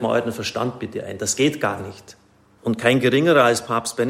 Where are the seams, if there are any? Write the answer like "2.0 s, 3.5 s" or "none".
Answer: 2.6 s